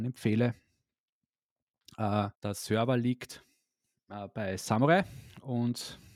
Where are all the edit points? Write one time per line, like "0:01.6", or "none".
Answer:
0:02.3

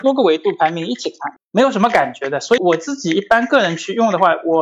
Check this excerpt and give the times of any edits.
0:01.4
0:02.6

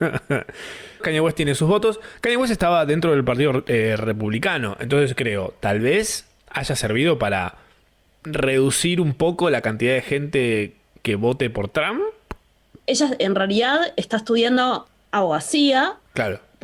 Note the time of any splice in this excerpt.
0:01.0
0:12.8

